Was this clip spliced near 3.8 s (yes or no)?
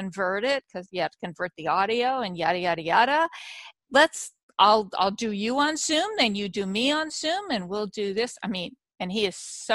yes